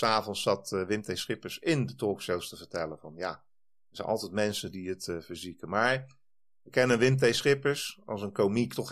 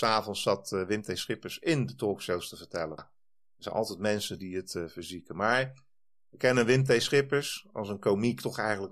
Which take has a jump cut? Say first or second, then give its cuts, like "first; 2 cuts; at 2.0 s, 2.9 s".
second; 1 cut; at 3.0 s